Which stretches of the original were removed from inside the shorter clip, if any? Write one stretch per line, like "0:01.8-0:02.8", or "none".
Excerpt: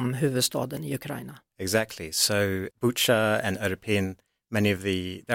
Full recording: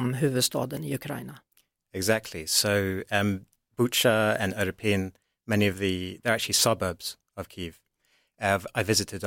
0:01.5-0:01.8
0:03.0-0:03.7

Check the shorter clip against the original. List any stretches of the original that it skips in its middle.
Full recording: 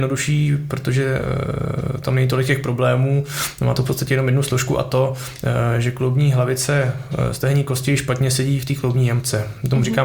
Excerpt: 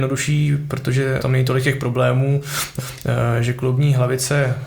0:01.2-0:02.0
0:03.6-0:05.1

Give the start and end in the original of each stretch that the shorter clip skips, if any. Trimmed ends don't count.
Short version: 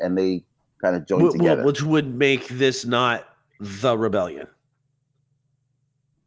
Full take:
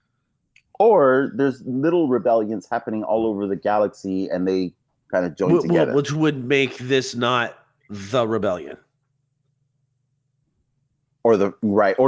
none

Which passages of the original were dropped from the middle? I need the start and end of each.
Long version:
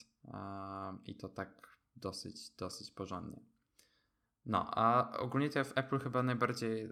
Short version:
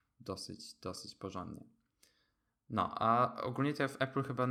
none

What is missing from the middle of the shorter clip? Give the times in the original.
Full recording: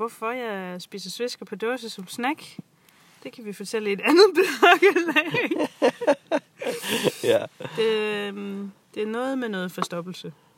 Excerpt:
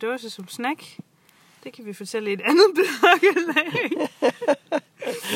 none

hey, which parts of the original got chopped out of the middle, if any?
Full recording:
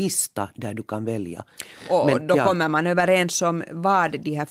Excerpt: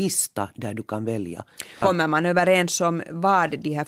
0:01.8-0:02.4

